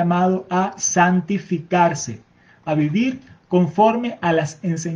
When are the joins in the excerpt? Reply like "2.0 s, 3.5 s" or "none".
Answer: 2.6 s